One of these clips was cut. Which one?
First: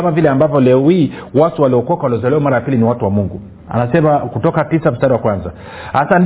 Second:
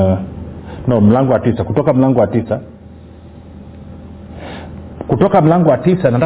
first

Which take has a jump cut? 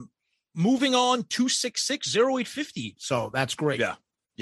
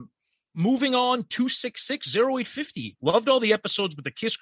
first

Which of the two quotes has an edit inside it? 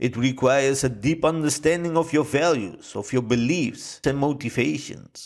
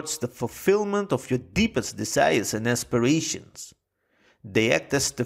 first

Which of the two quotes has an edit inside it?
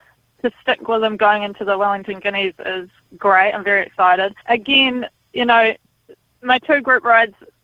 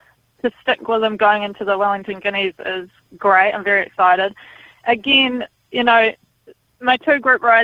first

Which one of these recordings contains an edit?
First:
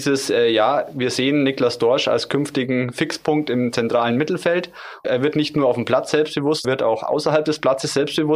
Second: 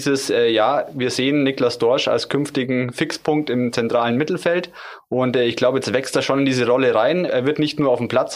first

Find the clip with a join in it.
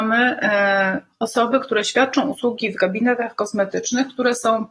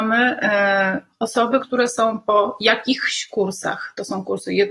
second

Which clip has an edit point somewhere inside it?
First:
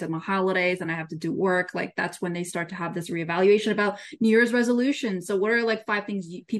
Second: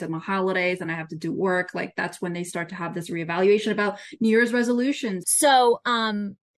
second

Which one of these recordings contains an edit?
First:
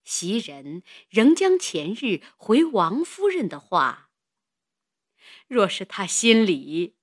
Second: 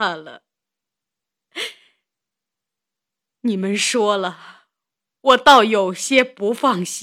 first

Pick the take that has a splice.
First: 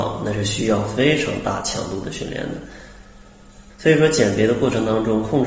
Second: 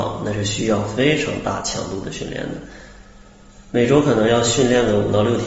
first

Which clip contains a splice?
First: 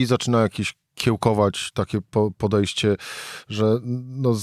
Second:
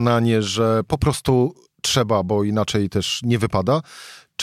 first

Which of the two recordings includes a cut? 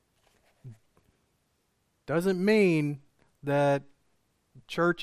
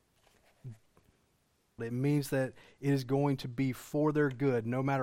second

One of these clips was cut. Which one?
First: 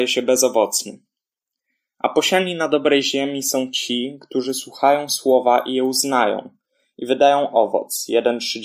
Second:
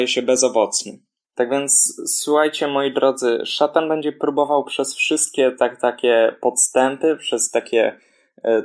second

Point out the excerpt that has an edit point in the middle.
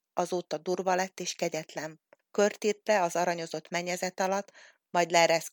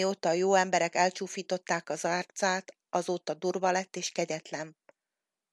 first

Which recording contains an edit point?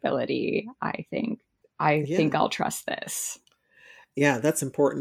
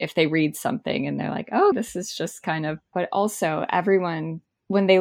second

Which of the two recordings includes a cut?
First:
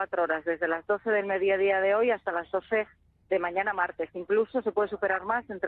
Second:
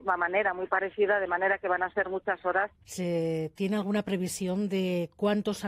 second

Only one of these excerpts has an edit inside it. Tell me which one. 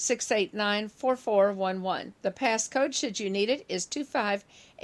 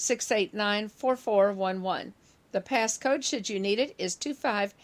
first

